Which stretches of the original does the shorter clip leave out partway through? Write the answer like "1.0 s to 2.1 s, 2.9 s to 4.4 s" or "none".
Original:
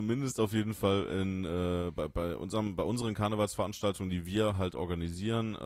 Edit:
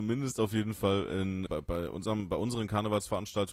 1.5 s to 1.9 s

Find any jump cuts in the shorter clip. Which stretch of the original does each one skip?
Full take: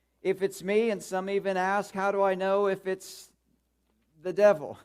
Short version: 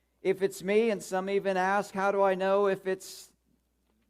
none

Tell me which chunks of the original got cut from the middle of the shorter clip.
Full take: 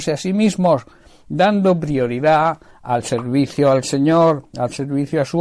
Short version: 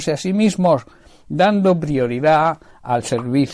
none

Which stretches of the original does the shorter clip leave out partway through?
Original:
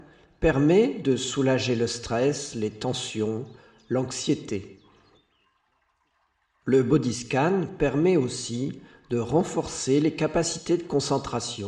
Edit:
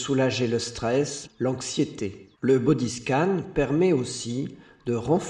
2.5 s to 3.7 s, 4.8 s to 6.6 s

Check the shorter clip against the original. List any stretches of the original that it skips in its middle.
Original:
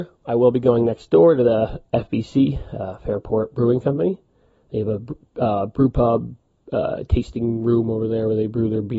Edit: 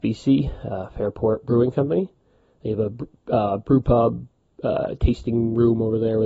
none

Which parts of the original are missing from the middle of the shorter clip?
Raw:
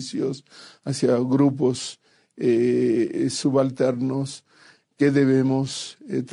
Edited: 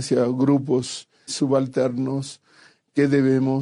2.2 s to 3.3 s

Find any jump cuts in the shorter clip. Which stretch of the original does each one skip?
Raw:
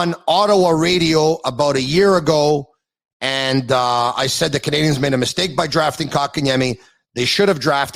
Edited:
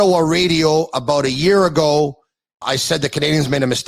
3.1 s to 4.1 s

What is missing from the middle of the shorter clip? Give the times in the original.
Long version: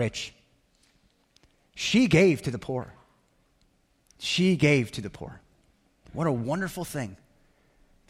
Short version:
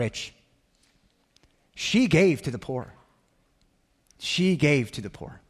none

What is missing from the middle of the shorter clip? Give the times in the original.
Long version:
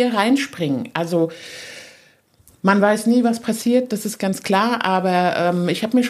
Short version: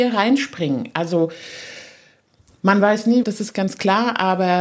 3.2 s to 3.9 s

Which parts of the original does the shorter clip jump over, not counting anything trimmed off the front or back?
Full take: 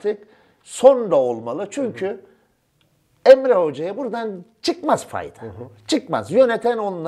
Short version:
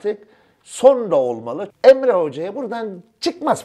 1.7 s to 3.1 s

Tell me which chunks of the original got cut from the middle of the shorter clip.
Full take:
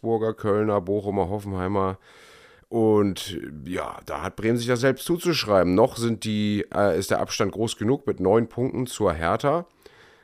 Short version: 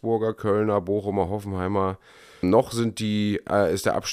2.4 s to 5.7 s

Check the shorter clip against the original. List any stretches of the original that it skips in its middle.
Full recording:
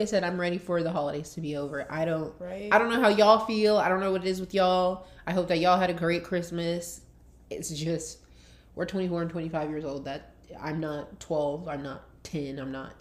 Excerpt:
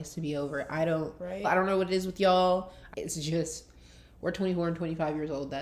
2.6 s to 3.8 s, 5.2 s to 7.4 s

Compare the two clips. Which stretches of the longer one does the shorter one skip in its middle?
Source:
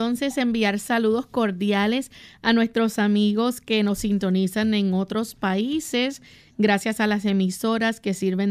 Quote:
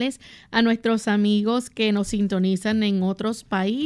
none

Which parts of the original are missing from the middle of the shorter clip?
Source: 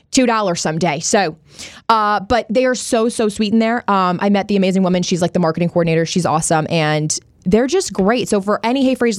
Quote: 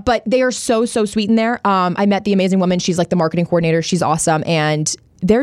none

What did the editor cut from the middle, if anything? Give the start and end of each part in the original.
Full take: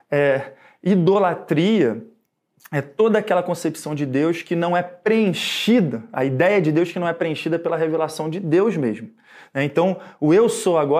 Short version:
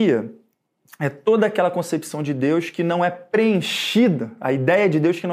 none

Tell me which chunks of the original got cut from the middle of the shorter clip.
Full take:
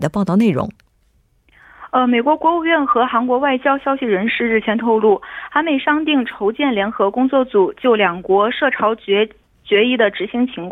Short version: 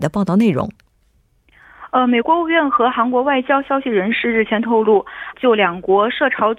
2.2 s to 2.4 s, 5.5 s to 7.7 s

